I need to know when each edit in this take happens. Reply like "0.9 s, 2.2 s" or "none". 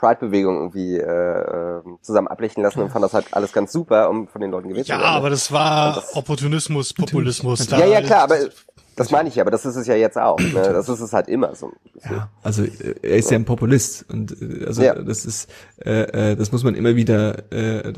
none